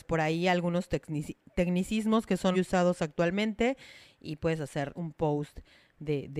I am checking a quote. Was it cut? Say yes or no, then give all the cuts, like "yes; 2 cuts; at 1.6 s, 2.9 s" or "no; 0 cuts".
yes; 2 cuts; at 2.5 s, 5.0 s